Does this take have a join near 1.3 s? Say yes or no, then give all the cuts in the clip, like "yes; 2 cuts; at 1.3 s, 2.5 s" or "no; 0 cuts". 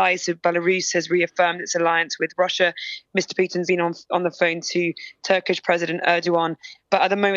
no; 1 cut; at 3.7 s